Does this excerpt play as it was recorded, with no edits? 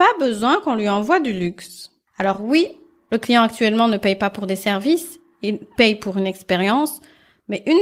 yes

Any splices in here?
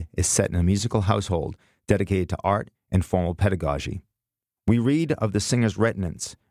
yes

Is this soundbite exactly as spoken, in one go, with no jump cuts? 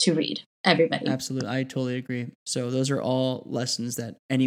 no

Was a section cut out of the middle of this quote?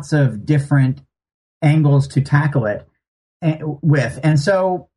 no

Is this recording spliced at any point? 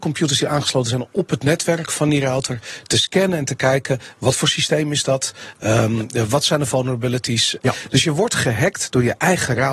yes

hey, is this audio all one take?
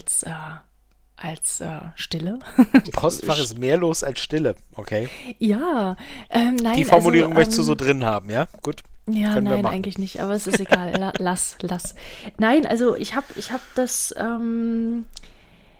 no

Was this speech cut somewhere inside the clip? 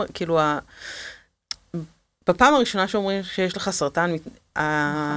no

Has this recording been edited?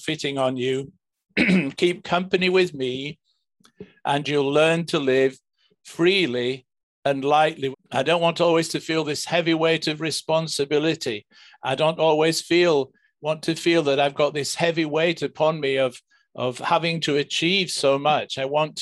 yes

